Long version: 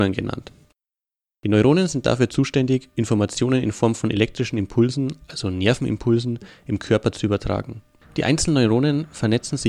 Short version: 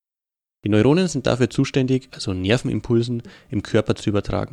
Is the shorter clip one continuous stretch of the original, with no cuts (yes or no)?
no